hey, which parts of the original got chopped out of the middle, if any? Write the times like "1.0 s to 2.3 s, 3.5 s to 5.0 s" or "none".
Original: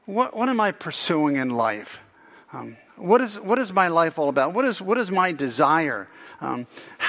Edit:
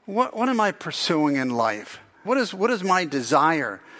2.3 s to 4.5 s